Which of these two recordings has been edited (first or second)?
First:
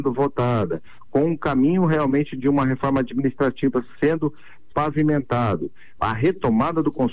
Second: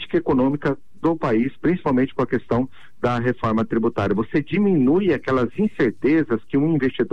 first